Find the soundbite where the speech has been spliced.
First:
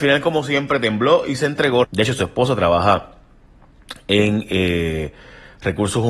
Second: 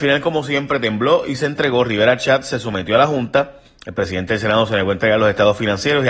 first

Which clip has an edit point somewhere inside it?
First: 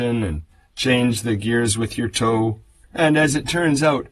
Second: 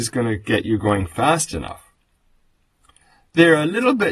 first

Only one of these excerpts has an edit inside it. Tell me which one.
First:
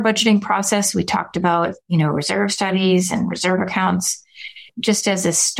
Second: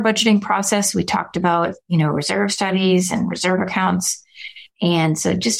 second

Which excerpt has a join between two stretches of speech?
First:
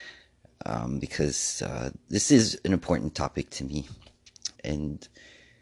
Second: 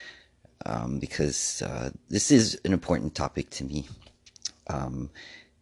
first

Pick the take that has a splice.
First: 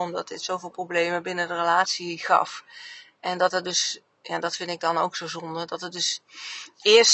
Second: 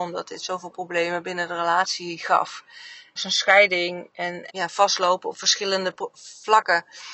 second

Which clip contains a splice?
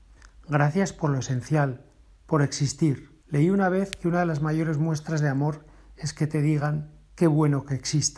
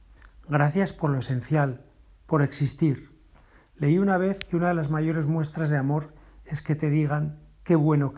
first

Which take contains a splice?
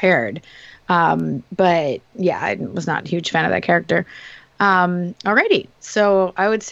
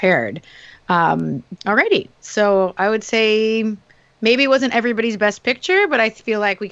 second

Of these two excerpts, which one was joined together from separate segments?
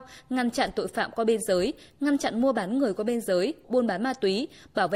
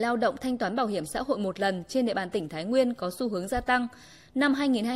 first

